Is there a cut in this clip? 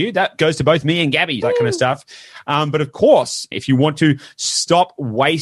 yes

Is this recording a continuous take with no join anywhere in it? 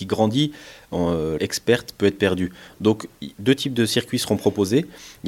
no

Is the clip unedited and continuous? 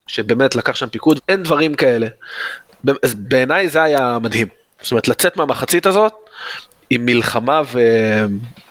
no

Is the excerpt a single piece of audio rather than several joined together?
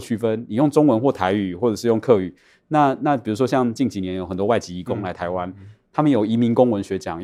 yes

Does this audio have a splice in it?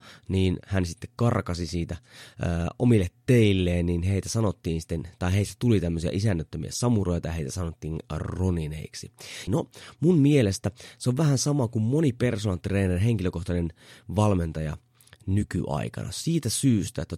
yes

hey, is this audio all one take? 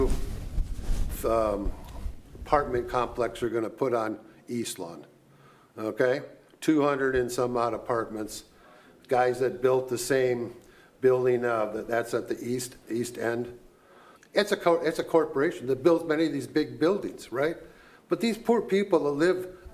no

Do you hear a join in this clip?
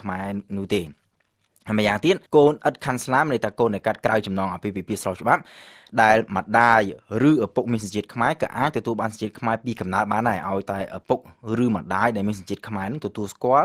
yes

